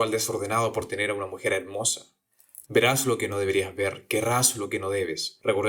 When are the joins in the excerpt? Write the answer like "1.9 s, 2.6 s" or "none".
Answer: 2.7 s